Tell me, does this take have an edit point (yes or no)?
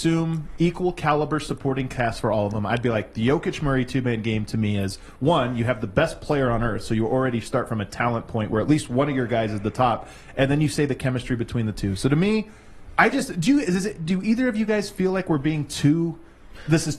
no